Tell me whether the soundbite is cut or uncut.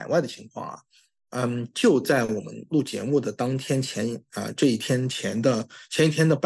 uncut